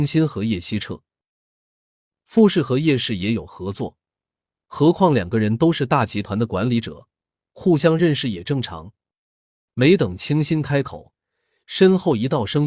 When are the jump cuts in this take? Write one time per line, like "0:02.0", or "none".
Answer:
0:09.7